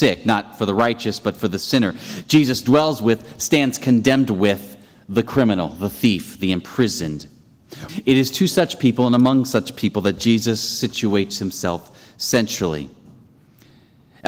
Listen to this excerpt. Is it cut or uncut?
cut